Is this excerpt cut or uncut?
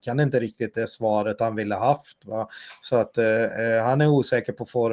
uncut